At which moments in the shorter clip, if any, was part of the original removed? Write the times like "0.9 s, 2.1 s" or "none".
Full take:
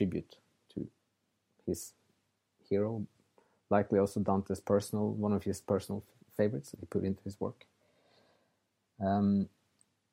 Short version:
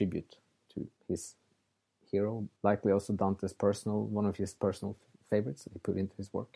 1.0 s, 2.6 s